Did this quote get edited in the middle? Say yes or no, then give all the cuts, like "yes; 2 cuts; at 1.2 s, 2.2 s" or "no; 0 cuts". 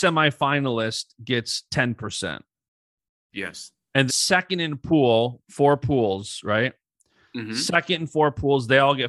yes; 2 cuts; at 4.1 s, 5.4 s